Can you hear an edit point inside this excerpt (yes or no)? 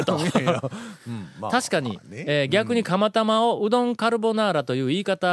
no